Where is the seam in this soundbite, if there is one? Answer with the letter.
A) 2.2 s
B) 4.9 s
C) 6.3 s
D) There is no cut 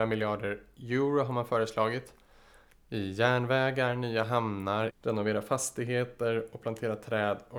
B